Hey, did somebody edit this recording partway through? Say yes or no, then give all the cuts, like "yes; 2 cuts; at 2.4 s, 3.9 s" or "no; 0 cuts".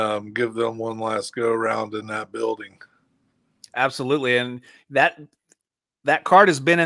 no; 0 cuts